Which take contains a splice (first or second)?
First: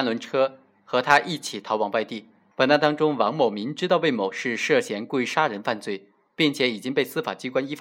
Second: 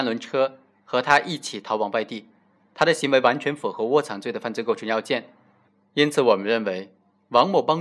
first